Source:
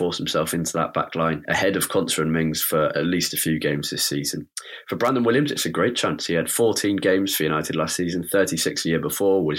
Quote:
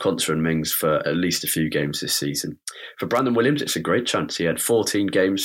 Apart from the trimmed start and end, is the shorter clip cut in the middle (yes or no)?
no